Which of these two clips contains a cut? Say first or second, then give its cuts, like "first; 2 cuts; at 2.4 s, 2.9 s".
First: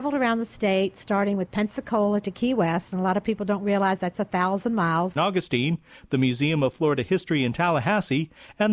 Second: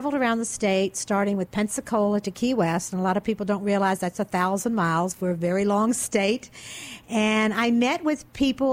first; 1 cut; at 5.2 s